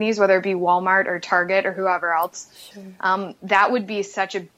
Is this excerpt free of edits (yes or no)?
yes